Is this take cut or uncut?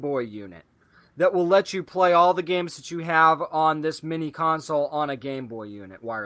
uncut